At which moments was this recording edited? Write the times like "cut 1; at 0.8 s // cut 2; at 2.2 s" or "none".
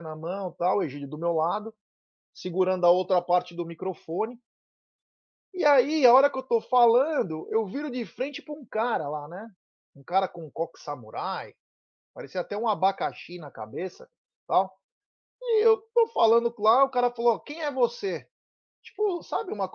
none